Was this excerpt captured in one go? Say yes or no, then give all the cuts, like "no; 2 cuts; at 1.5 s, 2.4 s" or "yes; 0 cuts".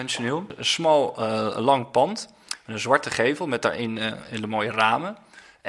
yes; 0 cuts